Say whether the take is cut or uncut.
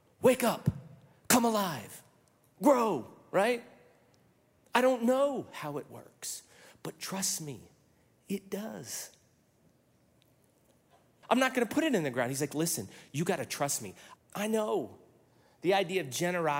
cut